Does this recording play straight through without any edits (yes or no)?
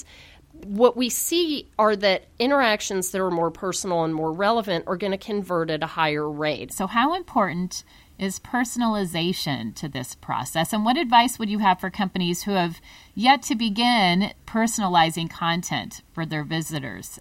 no